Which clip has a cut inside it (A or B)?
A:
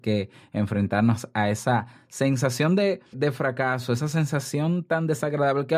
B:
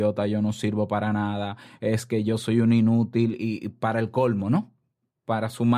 A